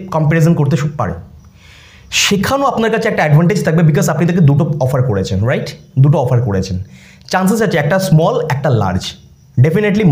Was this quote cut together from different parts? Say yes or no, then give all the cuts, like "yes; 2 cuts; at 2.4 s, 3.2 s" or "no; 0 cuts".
no; 0 cuts